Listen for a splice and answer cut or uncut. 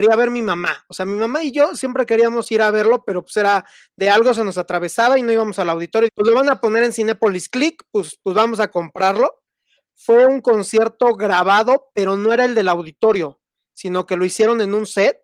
cut